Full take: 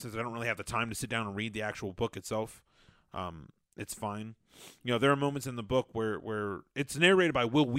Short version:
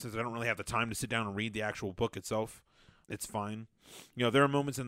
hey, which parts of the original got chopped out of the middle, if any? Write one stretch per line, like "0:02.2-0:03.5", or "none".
0:03.0-0:03.7